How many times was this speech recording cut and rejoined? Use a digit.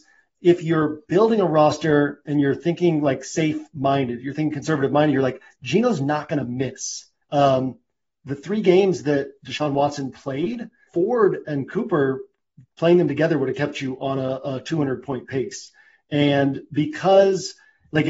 2